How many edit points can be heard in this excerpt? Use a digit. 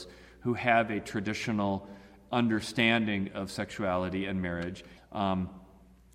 1